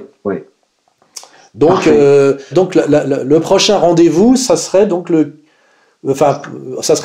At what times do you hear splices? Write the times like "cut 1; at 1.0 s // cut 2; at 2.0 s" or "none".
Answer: cut 1; at 2.5 s